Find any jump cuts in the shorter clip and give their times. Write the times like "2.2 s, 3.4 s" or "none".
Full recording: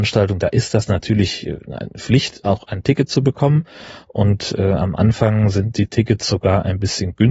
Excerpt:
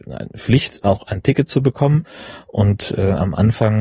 none